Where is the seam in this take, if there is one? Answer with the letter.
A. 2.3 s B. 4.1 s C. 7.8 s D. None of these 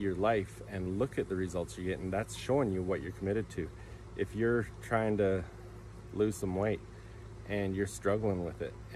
D